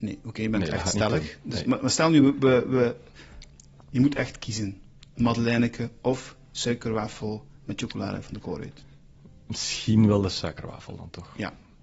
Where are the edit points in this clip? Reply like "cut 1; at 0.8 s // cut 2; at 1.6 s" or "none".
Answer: none